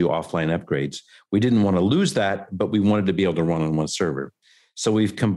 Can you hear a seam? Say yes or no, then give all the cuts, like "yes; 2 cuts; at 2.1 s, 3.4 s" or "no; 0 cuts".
no; 0 cuts